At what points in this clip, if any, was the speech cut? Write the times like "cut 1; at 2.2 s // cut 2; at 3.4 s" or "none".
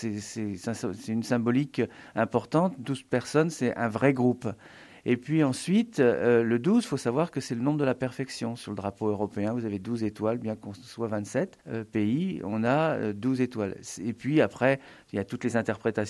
cut 1; at 11.6 s